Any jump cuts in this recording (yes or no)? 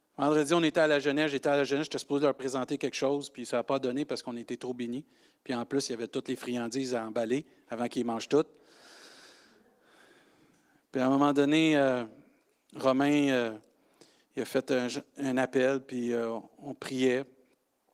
no